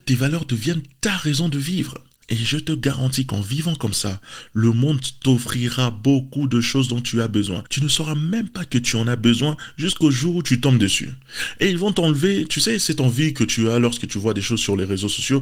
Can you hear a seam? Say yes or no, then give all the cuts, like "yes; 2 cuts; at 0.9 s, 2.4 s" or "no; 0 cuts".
no; 0 cuts